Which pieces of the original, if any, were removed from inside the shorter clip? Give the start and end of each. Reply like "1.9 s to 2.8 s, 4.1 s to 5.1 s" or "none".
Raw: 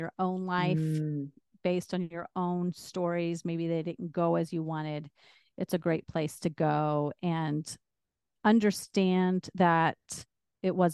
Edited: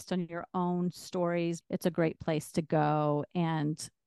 3.4 s to 5.5 s